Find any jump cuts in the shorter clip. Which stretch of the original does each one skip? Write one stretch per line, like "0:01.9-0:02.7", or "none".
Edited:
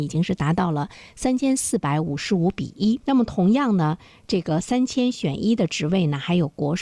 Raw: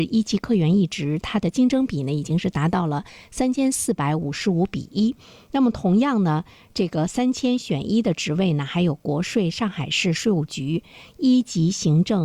0:05.2-0:05.5